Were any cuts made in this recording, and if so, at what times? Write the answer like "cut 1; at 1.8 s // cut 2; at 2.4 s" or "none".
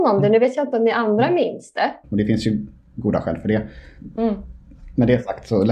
cut 1; at 2.0 s